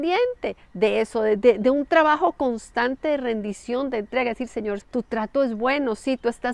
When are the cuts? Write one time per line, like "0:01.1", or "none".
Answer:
0:04.8

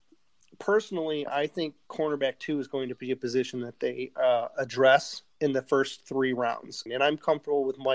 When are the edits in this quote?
0:06.9

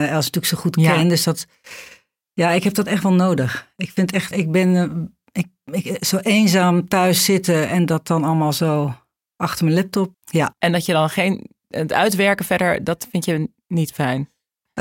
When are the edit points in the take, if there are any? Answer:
0:04.3
0:10.1

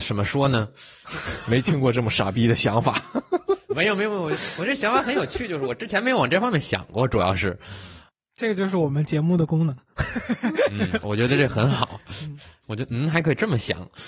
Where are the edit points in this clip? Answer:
0:11.0

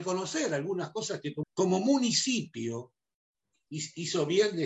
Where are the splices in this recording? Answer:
0:01.4

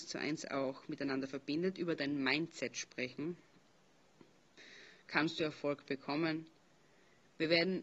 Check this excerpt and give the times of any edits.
0:05.0

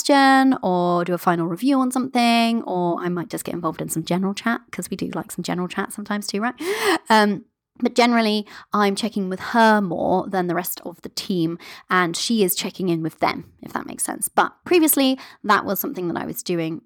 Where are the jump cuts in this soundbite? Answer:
none

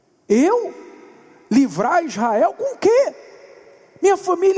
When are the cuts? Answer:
none

